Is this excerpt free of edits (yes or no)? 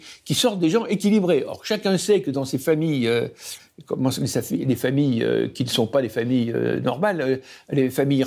yes